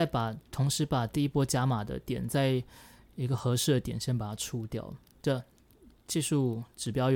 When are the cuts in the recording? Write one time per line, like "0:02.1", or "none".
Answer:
0:05.2